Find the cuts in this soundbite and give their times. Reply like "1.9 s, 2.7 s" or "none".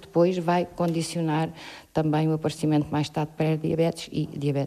none